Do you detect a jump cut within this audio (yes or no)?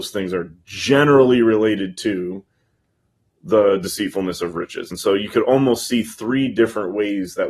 no